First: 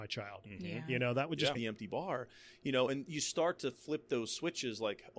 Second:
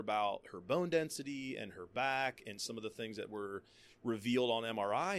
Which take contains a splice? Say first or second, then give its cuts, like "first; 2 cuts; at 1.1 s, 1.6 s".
first; 1 cut; at 1.5 s